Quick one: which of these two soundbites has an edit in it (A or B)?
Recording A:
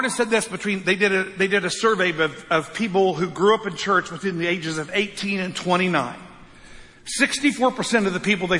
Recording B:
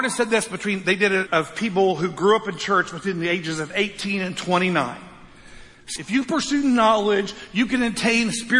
B